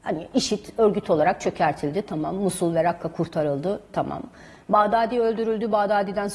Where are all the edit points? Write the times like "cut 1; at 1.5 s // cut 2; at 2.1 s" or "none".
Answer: none